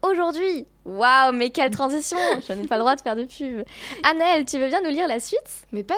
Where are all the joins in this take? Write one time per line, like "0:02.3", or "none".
0:02.7

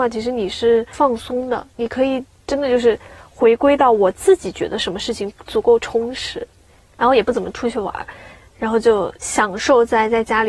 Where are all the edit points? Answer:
0:07.0

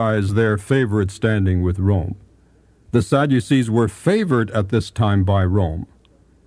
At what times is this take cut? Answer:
0:02.9

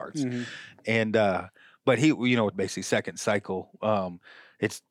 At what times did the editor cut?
0:02.5

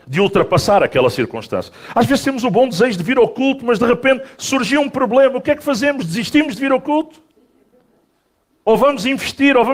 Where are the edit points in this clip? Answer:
none

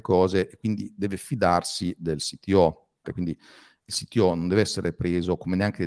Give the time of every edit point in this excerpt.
0:03.0

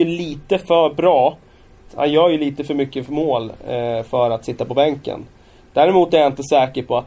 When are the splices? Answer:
0:01.9

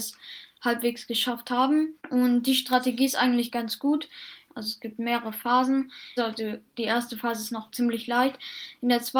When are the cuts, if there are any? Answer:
0:02.0
0:04.5
0:06.2

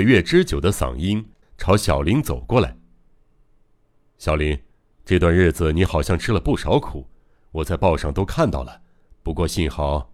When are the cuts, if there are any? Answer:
0:01.4

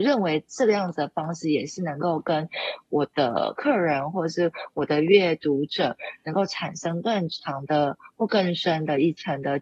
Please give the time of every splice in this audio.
none

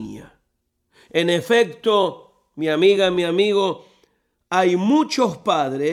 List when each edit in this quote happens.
none

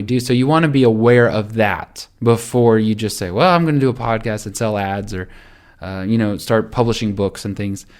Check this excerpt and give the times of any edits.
none

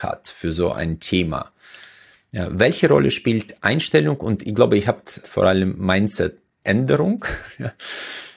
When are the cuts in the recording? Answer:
0:05.2

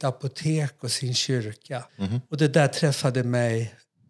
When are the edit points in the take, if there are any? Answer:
0:01.9

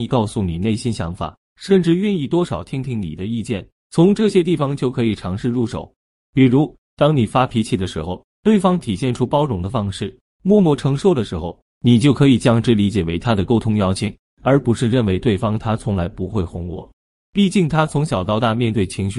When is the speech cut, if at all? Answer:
none

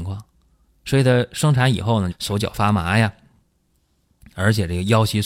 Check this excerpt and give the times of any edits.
0:02.1

